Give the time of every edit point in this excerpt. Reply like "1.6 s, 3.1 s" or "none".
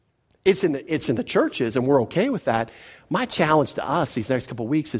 none

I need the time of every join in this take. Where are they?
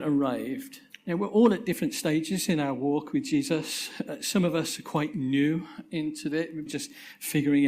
0.9 s, 6.7 s

